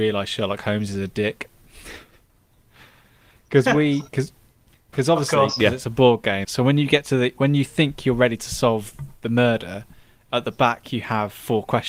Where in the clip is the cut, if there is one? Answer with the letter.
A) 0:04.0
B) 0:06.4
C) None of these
B